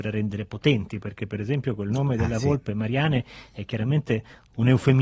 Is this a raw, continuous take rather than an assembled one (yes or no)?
yes